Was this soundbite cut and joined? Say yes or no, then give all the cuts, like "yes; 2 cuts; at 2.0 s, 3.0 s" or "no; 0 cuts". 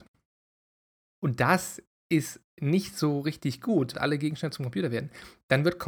yes; 2 cuts; at 1.1 s, 3.9 s